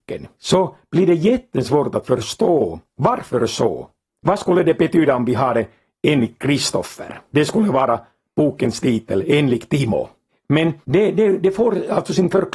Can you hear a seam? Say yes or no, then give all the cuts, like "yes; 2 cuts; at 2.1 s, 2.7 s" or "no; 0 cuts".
no; 0 cuts